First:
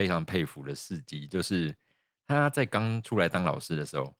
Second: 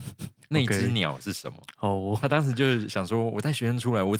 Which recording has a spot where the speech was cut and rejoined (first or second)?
second